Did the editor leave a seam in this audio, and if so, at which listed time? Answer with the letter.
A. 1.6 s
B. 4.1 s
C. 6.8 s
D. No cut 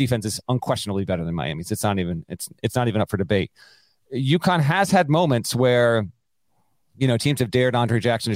D